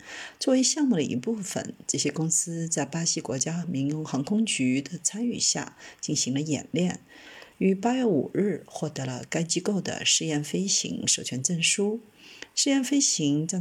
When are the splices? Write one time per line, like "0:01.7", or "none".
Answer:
none